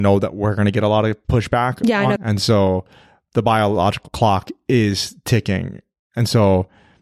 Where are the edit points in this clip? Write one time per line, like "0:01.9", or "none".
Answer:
0:02.2